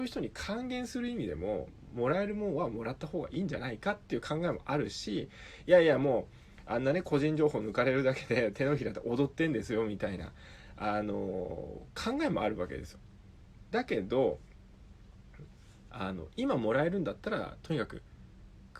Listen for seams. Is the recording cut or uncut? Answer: uncut